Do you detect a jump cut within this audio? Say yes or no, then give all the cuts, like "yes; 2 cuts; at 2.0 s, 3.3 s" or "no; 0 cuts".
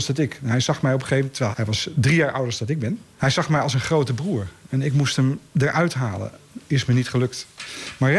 yes; 2 cuts; at 1.5 s, 3.2 s